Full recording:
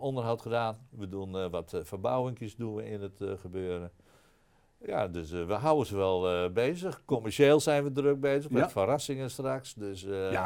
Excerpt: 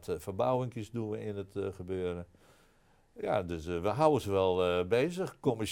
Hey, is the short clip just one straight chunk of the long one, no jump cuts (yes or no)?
yes